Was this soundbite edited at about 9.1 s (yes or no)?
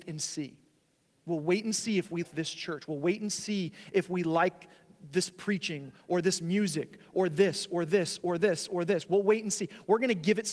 no